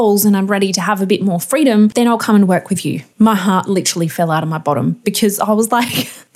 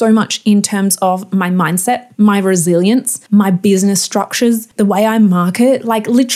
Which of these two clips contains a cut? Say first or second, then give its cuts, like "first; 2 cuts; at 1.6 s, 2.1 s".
second; 1 cut; at 4.7 s